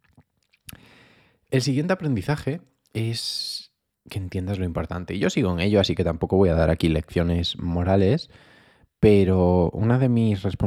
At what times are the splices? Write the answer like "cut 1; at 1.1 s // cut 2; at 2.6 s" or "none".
none